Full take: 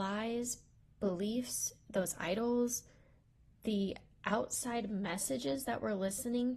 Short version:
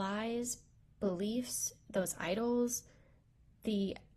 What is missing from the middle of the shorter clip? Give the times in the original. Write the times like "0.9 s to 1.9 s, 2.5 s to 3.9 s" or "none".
none

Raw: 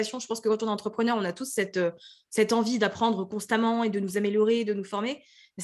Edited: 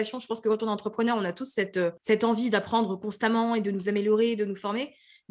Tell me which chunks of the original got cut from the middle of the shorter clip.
2.0 s to 2.3 s

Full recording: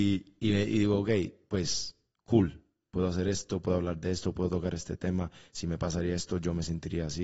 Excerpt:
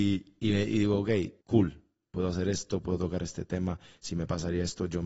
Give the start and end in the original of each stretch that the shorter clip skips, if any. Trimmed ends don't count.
1.4 s to 2.2 s, 3.6 s to 4.3 s

